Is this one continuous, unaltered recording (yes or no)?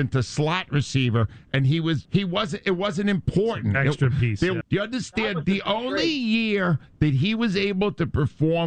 no